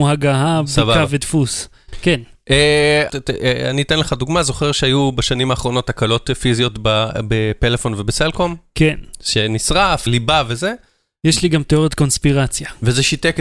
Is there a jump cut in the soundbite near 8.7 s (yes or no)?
no